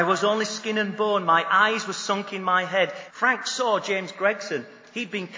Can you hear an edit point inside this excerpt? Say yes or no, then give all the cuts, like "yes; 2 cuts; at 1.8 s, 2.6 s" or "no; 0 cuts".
yes; 1 cut; at 3.1 s